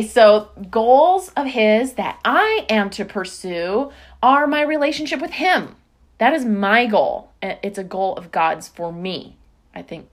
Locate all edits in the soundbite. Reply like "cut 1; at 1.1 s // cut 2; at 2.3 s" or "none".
none